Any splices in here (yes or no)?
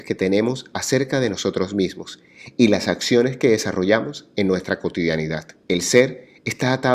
yes